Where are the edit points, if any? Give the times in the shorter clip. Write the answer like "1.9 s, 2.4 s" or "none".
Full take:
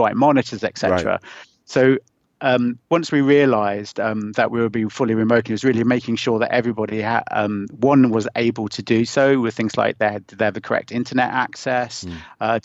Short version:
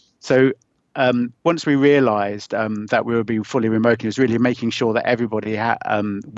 none